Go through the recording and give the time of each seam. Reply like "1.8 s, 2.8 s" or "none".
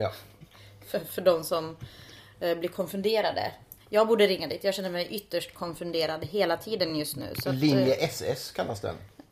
none